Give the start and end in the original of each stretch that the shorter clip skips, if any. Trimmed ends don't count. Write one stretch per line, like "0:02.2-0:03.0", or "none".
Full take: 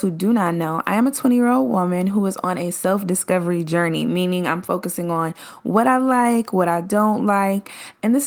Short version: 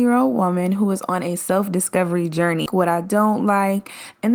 0:04.0-0:06.5